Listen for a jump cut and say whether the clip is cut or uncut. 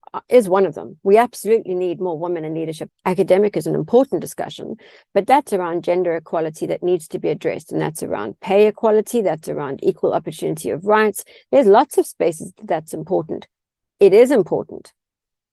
cut